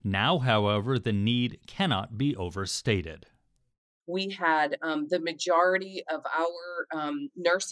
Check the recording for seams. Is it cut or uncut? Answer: uncut